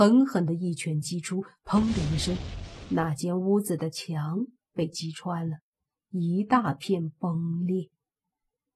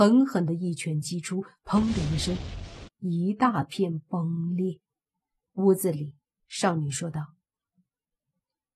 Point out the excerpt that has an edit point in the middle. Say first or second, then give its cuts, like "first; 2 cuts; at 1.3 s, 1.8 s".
second; 2 cuts; at 2.9 s, 5.5 s